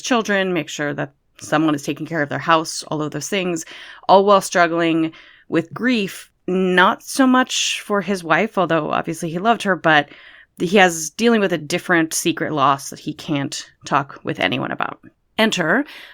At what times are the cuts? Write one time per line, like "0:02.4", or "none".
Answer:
none